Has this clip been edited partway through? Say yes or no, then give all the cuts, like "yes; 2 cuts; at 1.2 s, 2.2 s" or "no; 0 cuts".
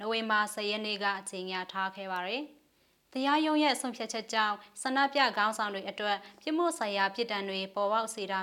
no; 0 cuts